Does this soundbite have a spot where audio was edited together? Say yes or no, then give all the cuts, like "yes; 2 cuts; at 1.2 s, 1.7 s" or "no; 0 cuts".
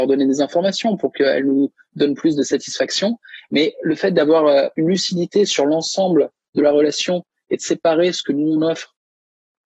no; 0 cuts